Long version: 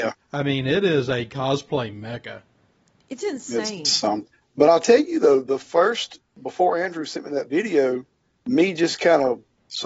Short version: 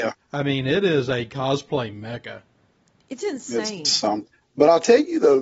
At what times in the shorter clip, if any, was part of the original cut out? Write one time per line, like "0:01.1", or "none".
none